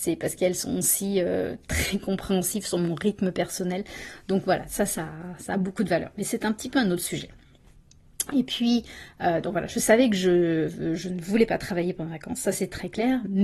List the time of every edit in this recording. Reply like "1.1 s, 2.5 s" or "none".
none